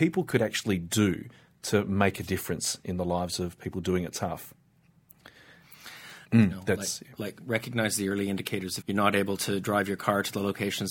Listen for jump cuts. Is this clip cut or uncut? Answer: cut